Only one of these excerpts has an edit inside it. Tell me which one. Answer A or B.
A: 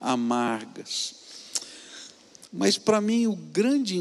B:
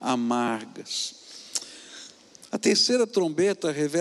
A